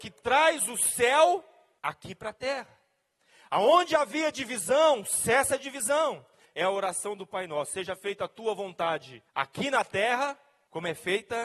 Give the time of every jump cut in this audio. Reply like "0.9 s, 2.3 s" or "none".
6.4 s, 9.3 s